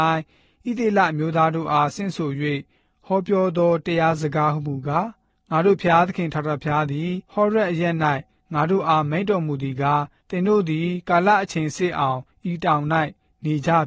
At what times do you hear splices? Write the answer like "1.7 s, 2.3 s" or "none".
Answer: 7.2 s